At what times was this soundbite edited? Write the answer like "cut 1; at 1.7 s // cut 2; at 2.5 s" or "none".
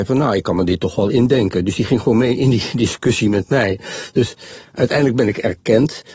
none